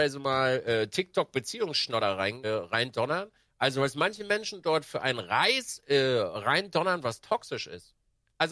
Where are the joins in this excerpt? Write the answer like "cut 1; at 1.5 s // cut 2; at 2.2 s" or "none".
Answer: cut 1; at 2.4 s